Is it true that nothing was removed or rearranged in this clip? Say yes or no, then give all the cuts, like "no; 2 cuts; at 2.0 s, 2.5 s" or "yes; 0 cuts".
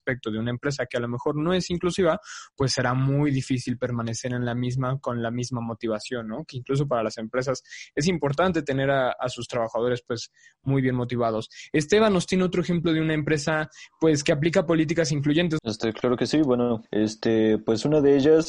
no; 2 cuts; at 15.6 s, 16.9 s